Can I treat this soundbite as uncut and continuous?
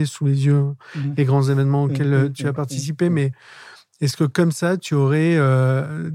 yes; 0 cuts

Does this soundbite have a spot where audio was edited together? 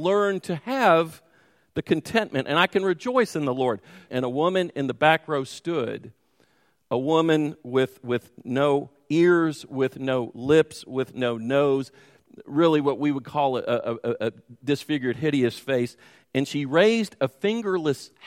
yes; 1 cut; at 4.1 s

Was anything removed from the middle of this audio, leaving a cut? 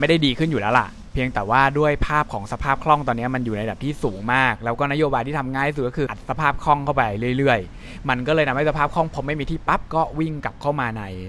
yes; 2 cuts; at 6.1 s, 9.7 s

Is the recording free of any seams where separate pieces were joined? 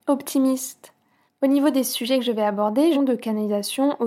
no; 2 cuts; at 1.3 s, 2.9 s

